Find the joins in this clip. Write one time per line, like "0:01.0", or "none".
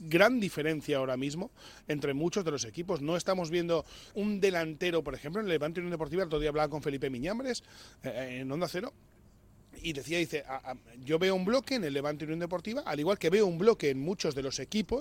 0:04.1